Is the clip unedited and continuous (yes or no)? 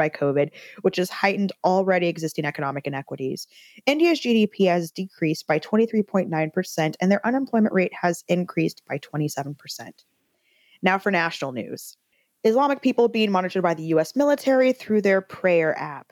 yes